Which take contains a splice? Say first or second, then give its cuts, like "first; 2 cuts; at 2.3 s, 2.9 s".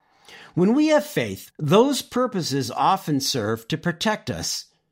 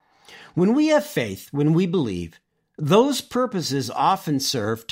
first; 1 cut; at 1.5 s